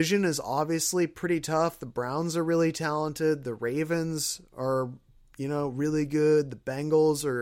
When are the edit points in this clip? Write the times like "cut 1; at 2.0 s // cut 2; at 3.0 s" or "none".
none